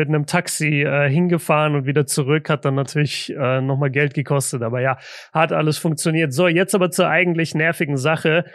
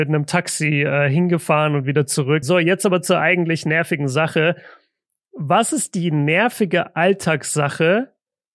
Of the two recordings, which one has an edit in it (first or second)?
second